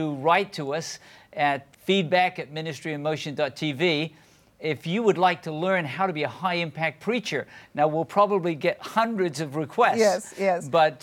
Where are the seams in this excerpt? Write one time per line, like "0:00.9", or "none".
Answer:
0:01.7